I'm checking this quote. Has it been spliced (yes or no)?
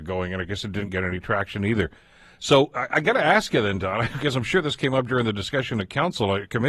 no